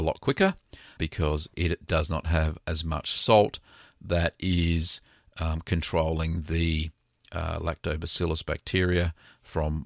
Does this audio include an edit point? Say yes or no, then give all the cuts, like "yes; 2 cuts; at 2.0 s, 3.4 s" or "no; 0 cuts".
yes; 1 cut; at 1.0 s